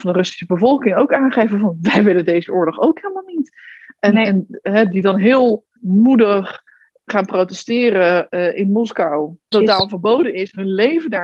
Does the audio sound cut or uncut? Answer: cut